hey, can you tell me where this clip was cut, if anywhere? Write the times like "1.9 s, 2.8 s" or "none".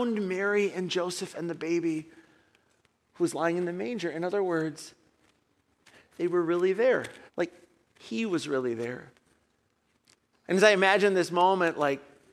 7.3 s, 10.3 s